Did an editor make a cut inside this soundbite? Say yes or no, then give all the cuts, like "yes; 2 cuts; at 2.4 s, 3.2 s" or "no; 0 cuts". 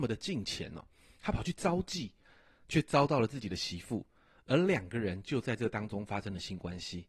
no; 0 cuts